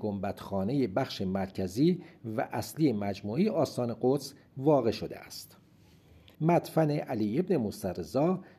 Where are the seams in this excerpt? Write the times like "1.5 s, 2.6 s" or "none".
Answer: 6.4 s